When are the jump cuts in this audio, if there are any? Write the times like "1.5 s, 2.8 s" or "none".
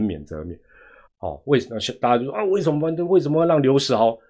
1.1 s